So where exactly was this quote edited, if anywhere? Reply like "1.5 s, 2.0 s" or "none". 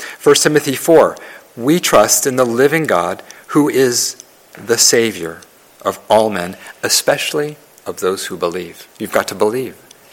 8.9 s